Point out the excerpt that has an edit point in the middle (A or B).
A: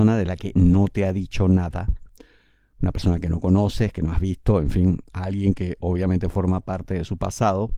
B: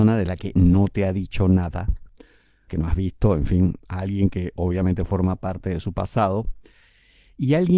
B